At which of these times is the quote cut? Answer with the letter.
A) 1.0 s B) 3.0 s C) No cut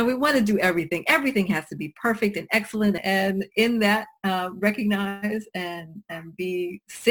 B